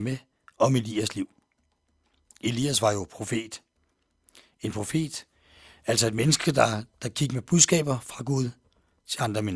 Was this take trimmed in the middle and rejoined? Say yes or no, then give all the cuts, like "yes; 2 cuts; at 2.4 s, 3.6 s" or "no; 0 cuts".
no; 0 cuts